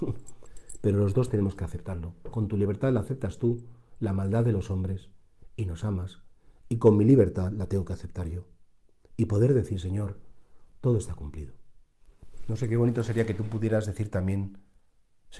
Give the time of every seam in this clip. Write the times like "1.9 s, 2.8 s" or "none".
none